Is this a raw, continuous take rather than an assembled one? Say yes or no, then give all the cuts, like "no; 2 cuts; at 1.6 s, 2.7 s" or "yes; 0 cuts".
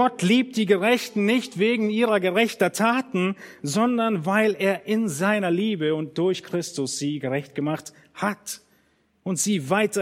yes; 0 cuts